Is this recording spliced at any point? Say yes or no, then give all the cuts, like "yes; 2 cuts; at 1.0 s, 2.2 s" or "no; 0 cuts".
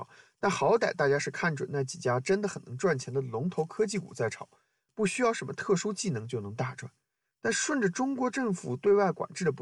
yes; 1 cut; at 4.9 s